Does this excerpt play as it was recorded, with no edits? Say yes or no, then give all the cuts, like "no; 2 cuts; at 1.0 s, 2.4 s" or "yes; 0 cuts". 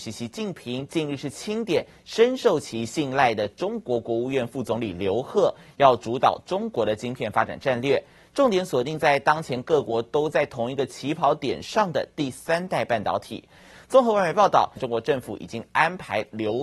no; 1 cut; at 14.8 s